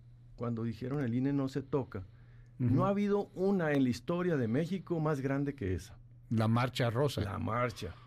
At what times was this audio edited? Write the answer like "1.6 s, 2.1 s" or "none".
none

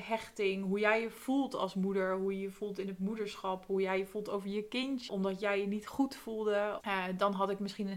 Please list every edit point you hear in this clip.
5.1 s, 6.8 s

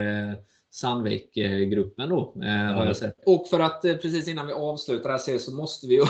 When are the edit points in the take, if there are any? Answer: 3.2 s

